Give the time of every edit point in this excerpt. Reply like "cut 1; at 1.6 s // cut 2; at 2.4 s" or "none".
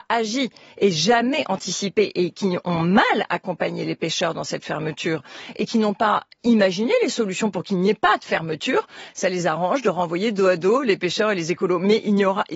none

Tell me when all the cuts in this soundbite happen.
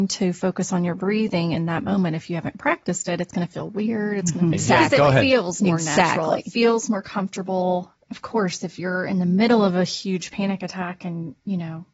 cut 1; at 4.5 s

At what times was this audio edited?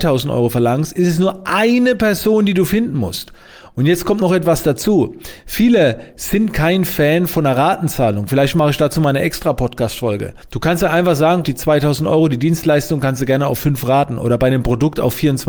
cut 1; at 10.4 s // cut 2; at 11.4 s

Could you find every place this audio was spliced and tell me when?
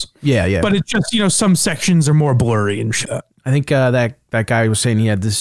cut 1; at 3.0 s

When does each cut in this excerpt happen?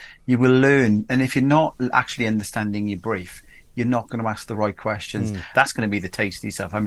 cut 1; at 5.5 s

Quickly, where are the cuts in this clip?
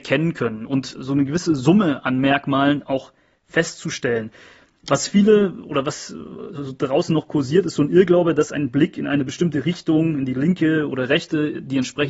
none

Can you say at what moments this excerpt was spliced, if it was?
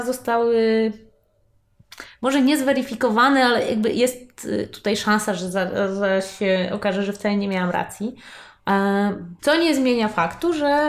cut 1; at 9.4 s

